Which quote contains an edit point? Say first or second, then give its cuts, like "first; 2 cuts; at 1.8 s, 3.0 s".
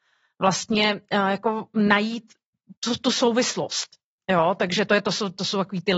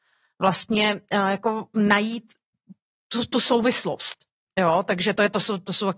first; 1 cut; at 2.8 s